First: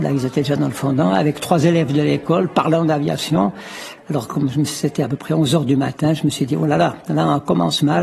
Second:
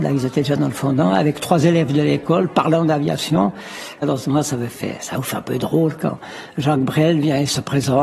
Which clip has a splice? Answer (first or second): second